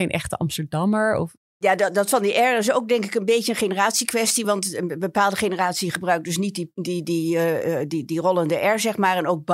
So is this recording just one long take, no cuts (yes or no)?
yes